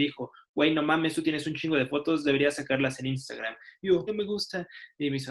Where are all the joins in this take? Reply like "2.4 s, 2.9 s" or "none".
4.1 s